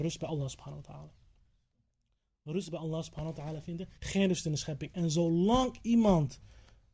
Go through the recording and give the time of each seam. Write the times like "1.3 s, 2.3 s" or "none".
4.0 s